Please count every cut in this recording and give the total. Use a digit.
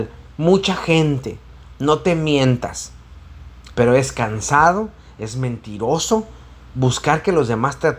1